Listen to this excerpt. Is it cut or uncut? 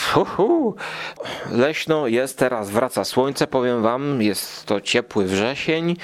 uncut